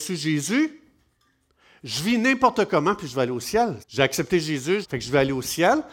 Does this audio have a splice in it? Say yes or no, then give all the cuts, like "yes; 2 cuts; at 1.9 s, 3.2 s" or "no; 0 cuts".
yes; 2 cuts; at 3.8 s, 4.8 s